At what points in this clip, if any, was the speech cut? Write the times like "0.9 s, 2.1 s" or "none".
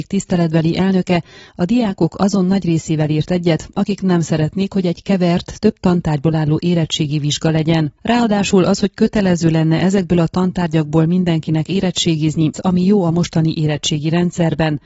8.0 s, 12.5 s